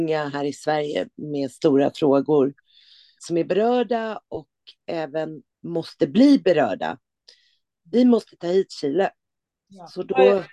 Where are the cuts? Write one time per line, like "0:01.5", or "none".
0:03.2
0:05.5

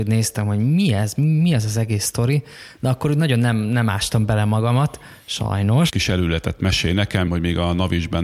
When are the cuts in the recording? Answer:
0:05.9
0:07.3

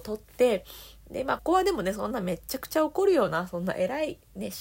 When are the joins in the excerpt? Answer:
0:01.4

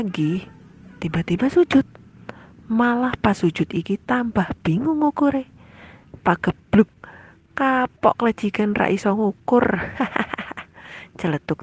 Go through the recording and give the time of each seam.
0:06.2

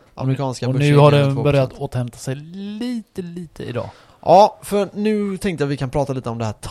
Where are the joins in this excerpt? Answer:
0:03.2

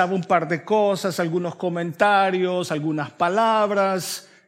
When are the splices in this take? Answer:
none

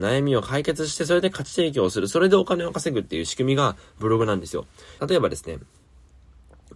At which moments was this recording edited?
0:05.0

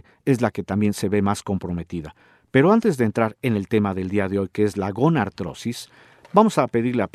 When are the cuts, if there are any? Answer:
none

